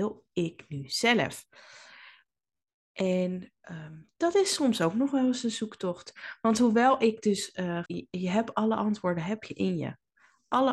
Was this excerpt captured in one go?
no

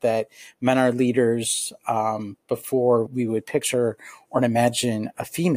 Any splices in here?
yes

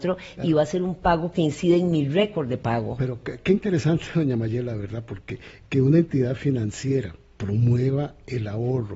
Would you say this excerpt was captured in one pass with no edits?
yes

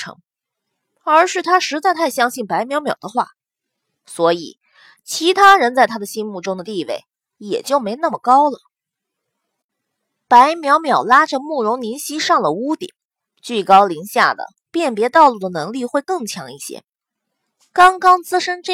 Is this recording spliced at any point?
no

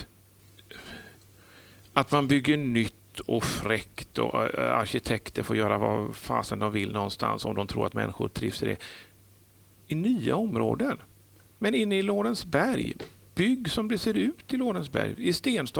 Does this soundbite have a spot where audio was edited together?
no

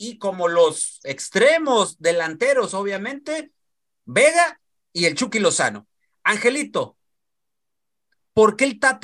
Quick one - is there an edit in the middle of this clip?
no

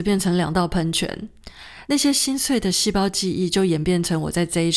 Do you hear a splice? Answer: yes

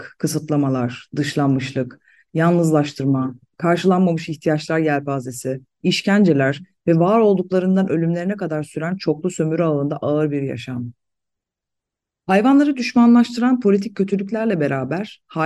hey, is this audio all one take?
yes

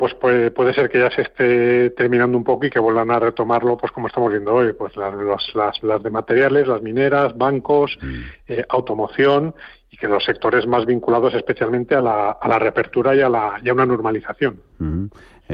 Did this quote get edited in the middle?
no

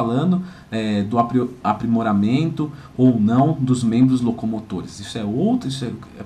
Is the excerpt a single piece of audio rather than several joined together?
yes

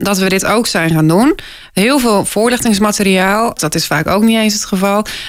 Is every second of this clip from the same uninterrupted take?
no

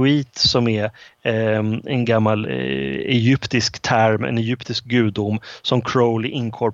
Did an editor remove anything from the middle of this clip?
yes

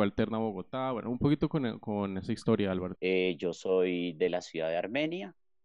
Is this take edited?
yes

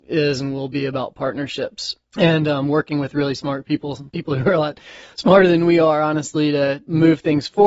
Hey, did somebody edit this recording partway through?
no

